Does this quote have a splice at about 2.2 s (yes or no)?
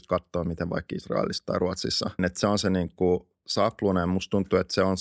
yes